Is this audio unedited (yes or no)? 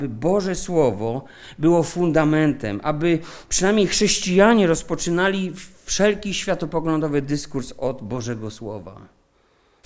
yes